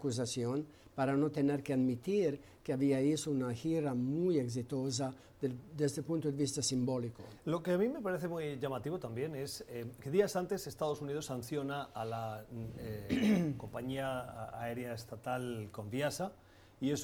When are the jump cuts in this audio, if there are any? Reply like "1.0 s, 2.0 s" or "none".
none